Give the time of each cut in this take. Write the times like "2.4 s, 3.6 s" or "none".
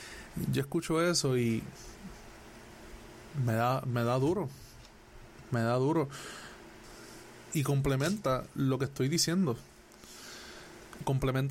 none